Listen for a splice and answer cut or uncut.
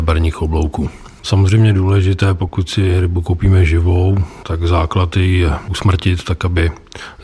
cut